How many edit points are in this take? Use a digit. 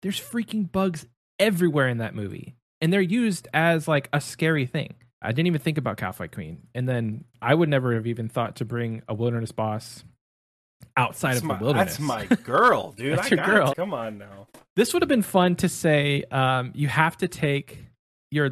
2